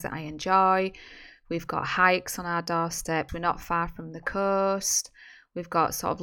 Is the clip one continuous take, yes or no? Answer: no